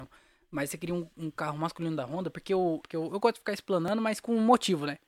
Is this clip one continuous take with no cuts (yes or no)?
no